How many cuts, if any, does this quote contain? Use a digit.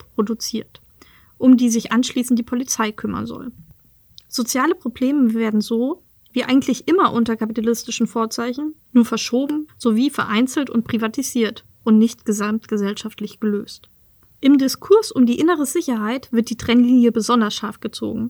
1